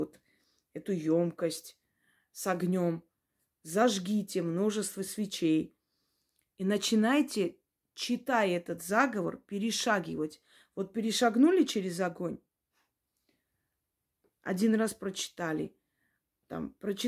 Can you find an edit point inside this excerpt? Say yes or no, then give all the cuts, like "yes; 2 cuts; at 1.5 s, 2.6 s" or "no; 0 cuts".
no; 0 cuts